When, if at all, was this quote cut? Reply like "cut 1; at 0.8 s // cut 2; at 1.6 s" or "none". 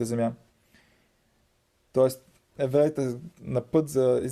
none